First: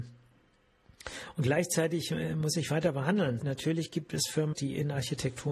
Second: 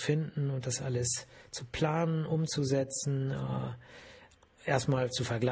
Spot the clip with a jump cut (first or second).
first